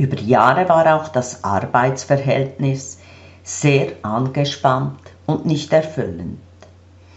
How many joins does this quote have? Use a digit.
0